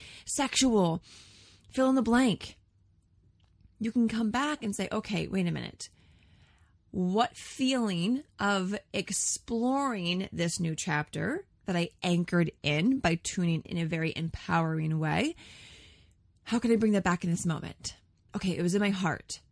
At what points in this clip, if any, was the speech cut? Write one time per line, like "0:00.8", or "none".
0:13.7
0:18.3